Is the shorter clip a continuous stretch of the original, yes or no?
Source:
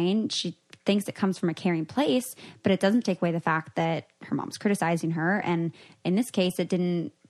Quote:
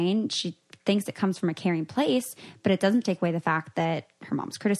yes